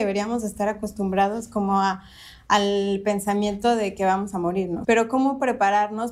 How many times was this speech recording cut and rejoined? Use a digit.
1